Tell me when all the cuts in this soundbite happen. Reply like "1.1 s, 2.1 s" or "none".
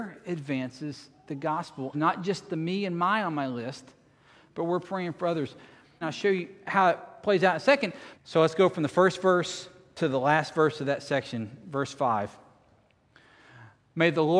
1.9 s, 6.0 s, 8.1 s